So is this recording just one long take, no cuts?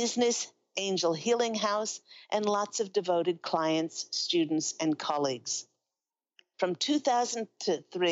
no; 1 cut; at 6.5 s

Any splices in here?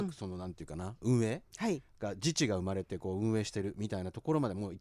no; 0 cuts

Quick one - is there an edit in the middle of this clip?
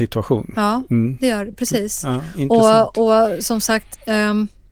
no; 0 cuts

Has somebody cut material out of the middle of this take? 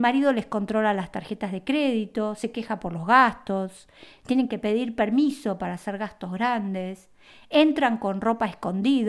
no; 0 cuts

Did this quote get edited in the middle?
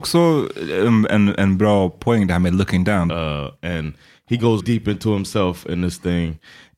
yes; 2 cuts; at 3.1 s, 4.6 s

